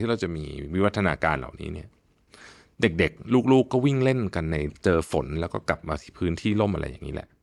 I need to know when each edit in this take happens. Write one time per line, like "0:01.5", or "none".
0:04.7